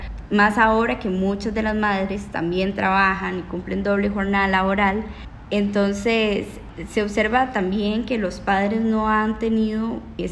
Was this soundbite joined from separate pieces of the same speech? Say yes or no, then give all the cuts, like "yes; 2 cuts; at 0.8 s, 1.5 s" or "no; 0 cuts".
no; 0 cuts